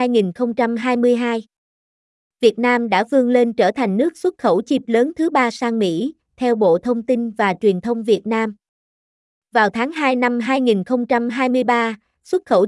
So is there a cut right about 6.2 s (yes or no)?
yes